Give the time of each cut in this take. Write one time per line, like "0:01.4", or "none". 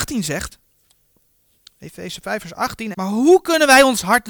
0:02.9